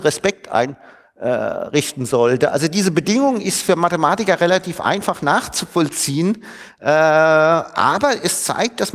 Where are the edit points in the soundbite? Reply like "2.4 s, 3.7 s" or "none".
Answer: none